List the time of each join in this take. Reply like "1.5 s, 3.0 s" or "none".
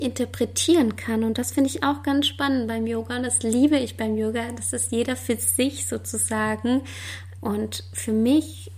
7.4 s